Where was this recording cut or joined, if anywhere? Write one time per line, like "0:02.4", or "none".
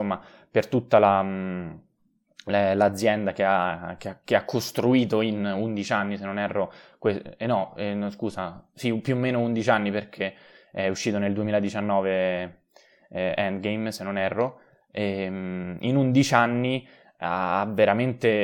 none